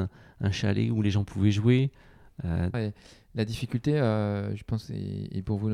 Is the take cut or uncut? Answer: cut